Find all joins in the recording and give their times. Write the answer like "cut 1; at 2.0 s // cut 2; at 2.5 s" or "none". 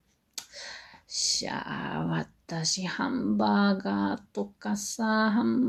none